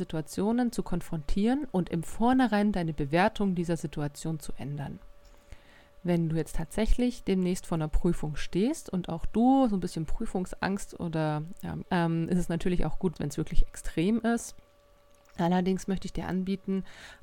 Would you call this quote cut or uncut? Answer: cut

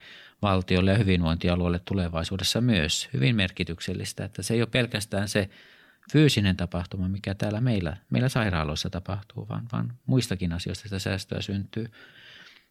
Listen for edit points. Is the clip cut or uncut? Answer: uncut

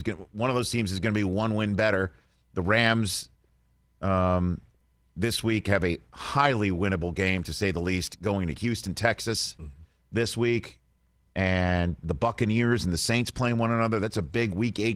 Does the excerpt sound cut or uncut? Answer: uncut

